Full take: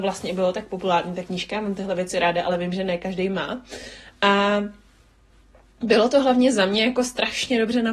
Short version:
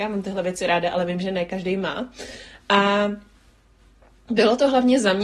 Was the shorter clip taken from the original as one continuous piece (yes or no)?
yes